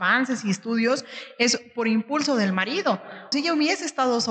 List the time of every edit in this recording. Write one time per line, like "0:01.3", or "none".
0:03.3